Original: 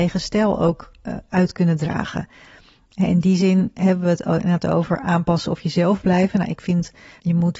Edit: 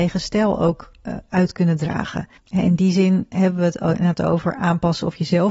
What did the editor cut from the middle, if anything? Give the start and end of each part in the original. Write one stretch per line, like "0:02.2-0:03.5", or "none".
0:02.4-0:02.8